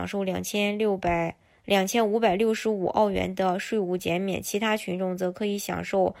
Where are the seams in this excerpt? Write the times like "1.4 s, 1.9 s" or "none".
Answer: none